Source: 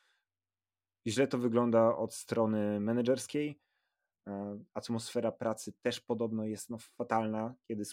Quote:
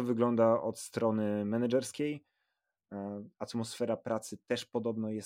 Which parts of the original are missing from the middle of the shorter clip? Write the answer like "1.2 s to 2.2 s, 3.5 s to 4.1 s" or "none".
none